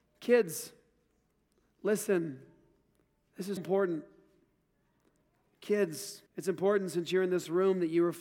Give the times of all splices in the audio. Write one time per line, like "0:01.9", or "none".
0:03.6
0:06.3